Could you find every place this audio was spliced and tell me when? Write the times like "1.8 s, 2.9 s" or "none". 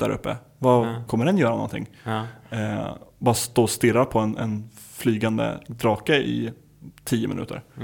1.1 s